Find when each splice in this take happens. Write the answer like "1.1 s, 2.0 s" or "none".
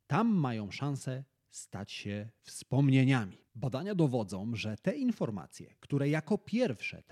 3.5 s